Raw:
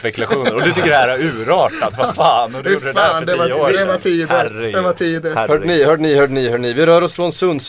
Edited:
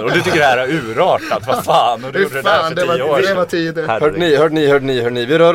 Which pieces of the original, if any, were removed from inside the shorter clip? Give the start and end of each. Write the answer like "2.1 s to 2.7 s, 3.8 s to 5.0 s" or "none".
3.9 s to 4.8 s